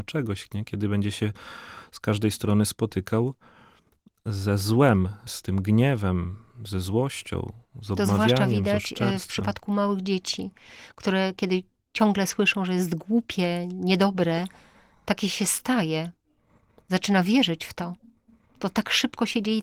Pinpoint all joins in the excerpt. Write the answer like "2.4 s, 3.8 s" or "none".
none